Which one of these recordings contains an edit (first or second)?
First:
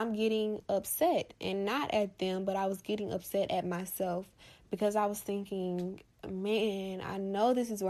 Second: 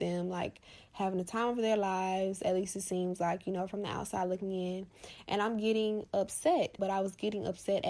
second